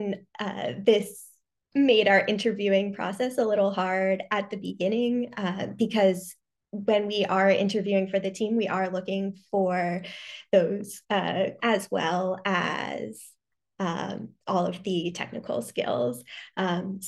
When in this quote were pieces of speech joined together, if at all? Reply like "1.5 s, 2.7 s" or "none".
11.6 s